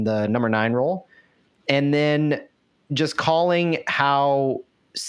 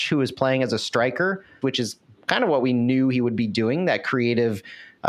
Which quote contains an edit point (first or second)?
second